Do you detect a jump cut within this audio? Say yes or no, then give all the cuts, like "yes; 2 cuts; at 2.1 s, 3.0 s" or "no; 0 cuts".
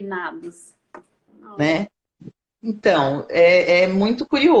yes; 2 cuts; at 1.3 s, 2.5 s